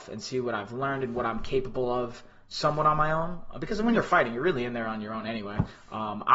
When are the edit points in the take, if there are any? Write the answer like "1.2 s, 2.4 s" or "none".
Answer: none